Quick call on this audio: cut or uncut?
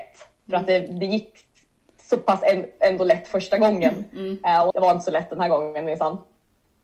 cut